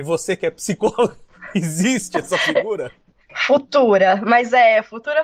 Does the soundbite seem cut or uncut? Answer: uncut